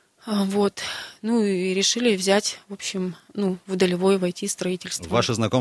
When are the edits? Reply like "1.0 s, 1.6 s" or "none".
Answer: none